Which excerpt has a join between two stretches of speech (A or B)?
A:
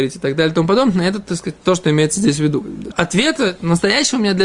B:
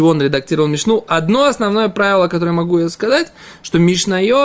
A